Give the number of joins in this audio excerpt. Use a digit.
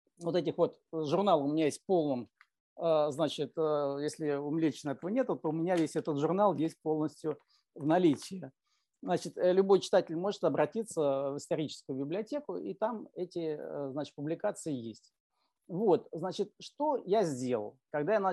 0